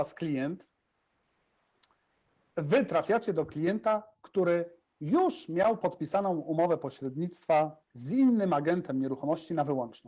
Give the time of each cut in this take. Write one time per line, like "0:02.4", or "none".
0:07.8